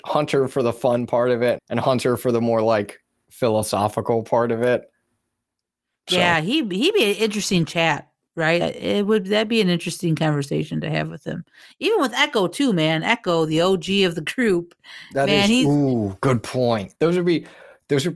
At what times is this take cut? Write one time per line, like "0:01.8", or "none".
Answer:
0:01.6
0:08.6
0:16.9